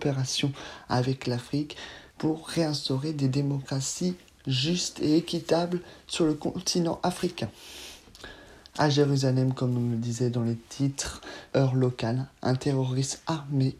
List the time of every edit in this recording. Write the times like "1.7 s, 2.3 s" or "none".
2.1 s, 11.5 s